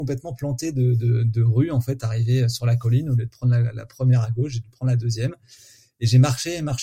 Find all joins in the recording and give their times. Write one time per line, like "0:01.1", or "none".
none